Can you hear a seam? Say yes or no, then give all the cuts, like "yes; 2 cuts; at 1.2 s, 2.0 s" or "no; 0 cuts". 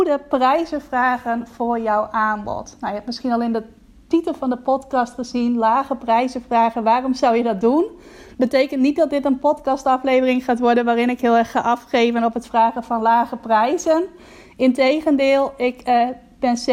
no; 0 cuts